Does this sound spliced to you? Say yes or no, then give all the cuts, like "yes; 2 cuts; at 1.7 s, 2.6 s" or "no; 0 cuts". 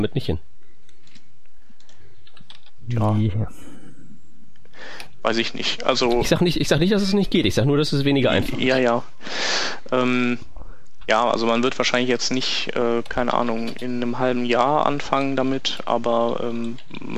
no; 0 cuts